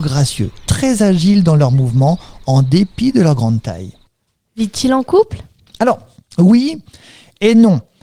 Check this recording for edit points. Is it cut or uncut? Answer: uncut